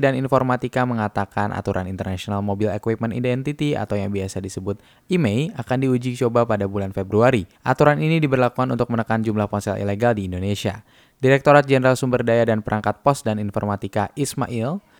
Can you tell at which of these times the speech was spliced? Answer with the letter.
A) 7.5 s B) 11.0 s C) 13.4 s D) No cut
A